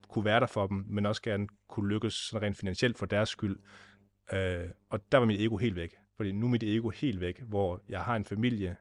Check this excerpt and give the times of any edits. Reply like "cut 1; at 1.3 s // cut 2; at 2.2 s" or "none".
cut 1; at 6.1 s